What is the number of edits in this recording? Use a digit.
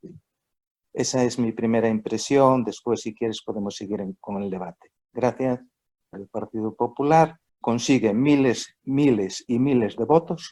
2